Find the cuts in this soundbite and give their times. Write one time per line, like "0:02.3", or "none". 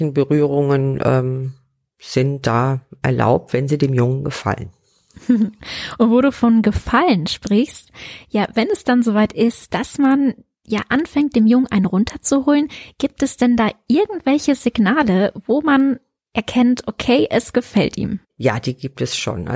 none